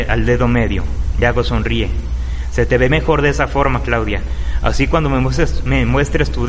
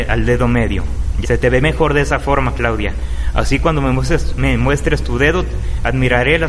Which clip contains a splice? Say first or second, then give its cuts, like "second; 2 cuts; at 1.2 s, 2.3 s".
second; 1 cut; at 1.2 s